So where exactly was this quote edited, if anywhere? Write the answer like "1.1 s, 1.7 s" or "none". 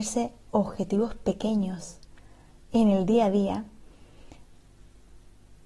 none